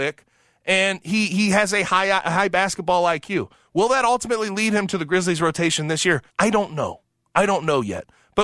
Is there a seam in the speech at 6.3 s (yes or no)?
yes